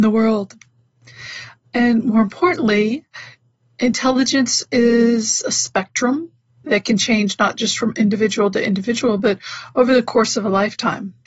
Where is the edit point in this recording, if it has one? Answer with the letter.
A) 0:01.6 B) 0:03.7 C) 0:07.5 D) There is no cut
A